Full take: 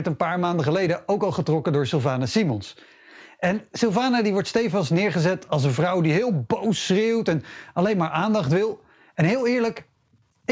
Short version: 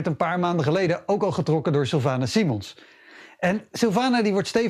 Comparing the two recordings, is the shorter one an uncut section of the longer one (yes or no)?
yes